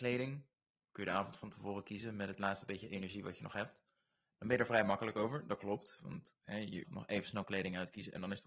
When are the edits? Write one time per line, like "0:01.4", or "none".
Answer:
0:06.8